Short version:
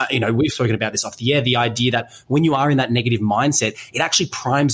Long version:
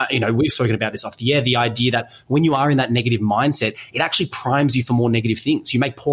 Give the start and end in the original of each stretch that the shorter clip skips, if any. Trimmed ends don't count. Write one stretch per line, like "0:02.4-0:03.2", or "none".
none